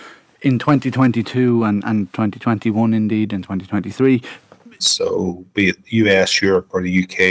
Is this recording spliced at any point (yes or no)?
yes